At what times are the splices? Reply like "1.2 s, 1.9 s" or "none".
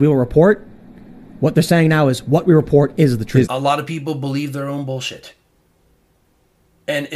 3.4 s